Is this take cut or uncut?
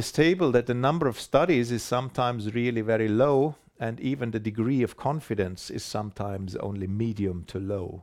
uncut